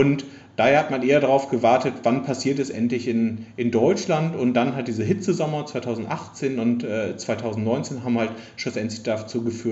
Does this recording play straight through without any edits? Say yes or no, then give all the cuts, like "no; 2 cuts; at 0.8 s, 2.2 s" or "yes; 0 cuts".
yes; 0 cuts